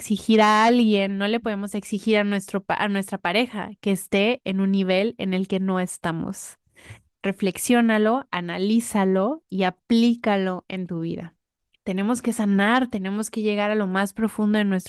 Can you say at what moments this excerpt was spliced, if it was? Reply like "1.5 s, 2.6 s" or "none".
7.1 s, 11.7 s

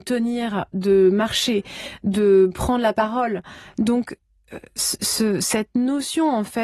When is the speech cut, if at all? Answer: 3.7 s

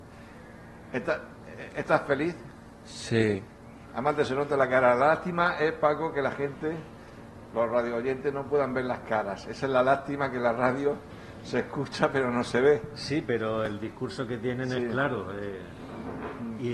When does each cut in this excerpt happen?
none

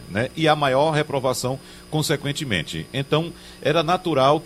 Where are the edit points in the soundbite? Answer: none

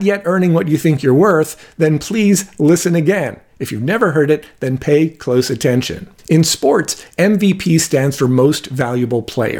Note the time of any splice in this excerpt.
6.2 s

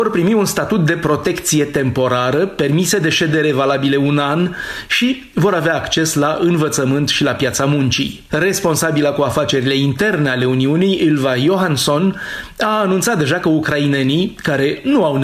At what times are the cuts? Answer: 8.3 s

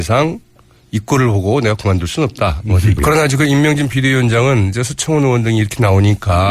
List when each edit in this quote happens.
3.0 s

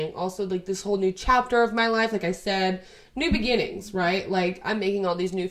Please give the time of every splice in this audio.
none

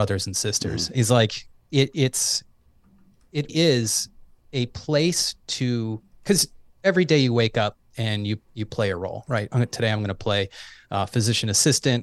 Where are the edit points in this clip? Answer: 0.9 s, 3.5 s

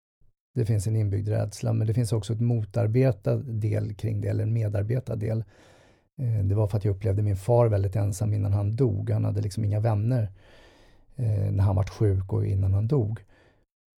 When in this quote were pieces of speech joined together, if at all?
none

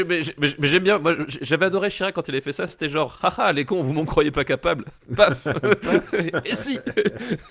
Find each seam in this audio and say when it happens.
none

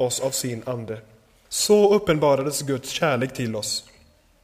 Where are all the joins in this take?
1.4 s

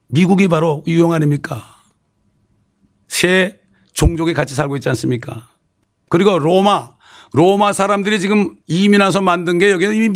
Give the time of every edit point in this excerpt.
none

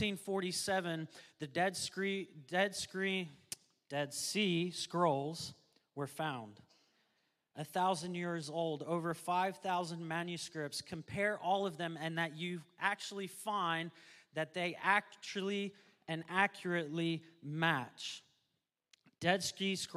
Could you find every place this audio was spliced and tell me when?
none

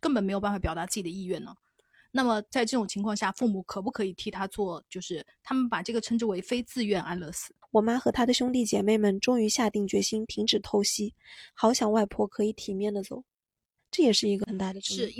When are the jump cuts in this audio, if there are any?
7.6 s, 11.5 s, 13.8 s

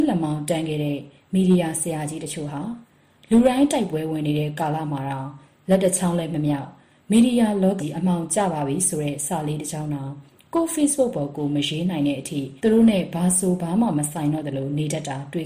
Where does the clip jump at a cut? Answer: 7.8 s, 12.6 s

